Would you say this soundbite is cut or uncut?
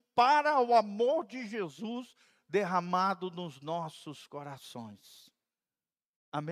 uncut